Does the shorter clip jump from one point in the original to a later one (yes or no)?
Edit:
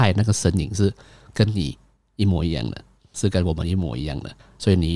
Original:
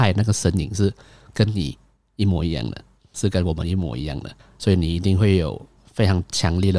no